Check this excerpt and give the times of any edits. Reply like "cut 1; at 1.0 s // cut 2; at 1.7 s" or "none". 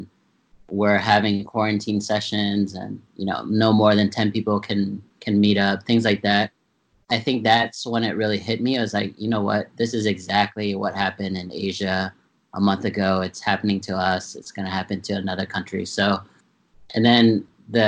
none